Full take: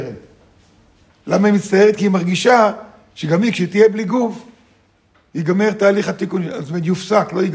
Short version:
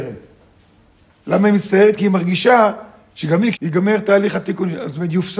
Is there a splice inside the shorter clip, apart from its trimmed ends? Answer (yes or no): yes